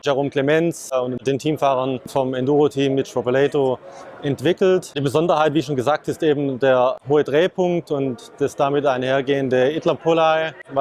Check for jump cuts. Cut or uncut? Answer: uncut